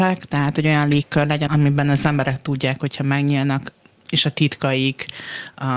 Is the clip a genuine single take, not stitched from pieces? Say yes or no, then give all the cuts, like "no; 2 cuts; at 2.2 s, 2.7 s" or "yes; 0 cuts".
no; 1 cut; at 1.5 s